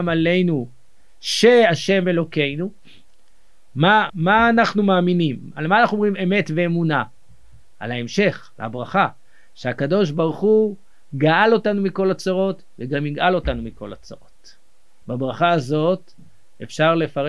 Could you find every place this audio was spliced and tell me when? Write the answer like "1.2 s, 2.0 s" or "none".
4.1 s, 15.0 s